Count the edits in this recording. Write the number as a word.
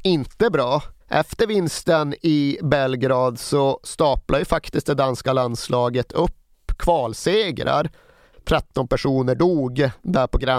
two